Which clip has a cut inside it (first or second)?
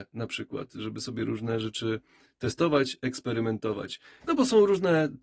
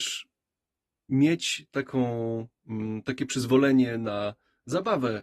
first